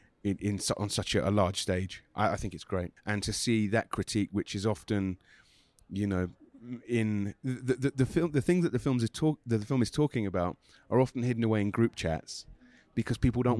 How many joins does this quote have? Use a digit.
1